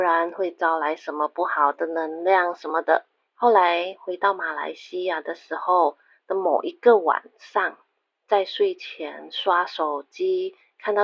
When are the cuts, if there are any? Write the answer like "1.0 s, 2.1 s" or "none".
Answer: 3.3 s